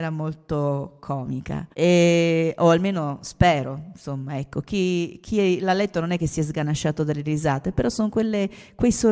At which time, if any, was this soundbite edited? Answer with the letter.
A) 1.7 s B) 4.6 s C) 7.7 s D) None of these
A